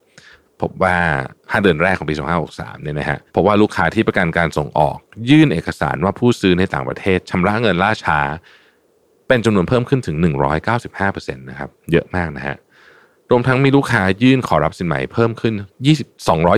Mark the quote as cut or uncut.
cut